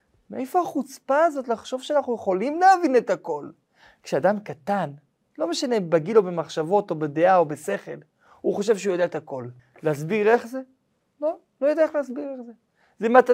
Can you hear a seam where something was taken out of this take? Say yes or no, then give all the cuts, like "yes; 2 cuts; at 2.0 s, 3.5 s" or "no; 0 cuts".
yes; 1 cut; at 9.6 s